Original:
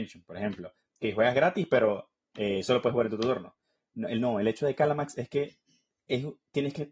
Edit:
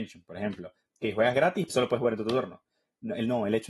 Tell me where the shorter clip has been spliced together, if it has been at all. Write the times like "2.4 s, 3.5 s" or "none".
1.7 s